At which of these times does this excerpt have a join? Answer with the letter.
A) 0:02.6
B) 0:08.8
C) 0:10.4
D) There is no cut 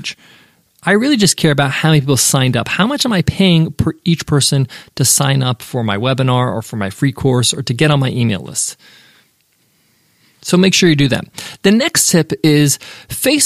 D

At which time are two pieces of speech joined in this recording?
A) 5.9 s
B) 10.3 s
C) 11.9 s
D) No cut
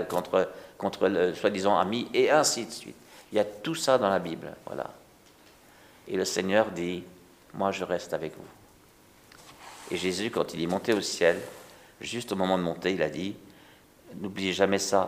D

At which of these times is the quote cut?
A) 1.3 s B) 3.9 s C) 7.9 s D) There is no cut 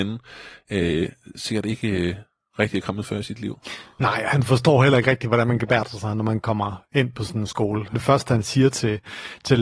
C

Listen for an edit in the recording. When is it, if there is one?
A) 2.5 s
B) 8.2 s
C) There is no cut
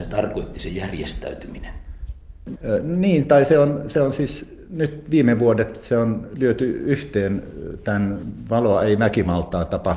A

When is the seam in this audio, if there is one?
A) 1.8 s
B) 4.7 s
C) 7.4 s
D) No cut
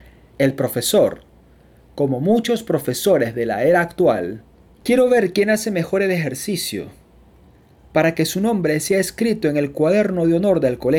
B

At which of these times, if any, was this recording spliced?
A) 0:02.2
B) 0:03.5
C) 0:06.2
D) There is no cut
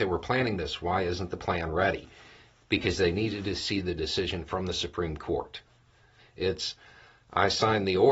C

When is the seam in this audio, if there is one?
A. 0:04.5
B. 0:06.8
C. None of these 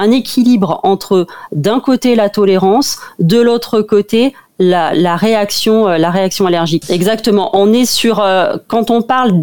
B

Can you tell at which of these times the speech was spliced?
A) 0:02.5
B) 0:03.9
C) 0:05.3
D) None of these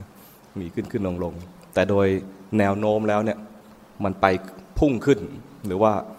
A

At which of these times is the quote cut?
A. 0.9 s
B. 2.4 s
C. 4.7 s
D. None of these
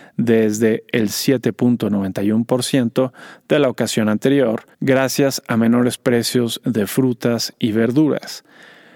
C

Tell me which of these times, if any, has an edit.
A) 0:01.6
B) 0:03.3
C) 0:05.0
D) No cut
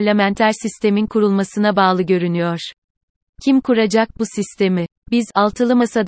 D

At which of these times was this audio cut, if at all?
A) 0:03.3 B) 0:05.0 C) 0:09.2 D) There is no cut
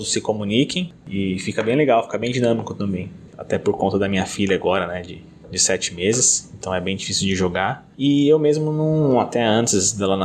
A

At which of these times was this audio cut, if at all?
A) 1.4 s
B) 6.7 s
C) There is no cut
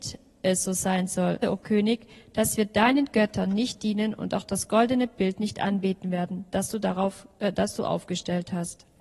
A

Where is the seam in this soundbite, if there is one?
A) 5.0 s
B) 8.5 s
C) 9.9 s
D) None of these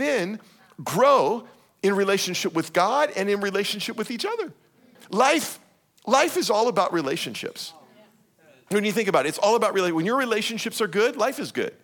A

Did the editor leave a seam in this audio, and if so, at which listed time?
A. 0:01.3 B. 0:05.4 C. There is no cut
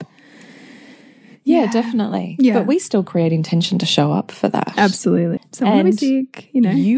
B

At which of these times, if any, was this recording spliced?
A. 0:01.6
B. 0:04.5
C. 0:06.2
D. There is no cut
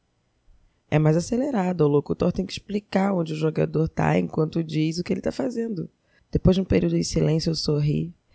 C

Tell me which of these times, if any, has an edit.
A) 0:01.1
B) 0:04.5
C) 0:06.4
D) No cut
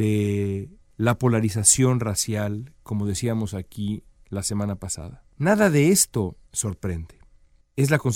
C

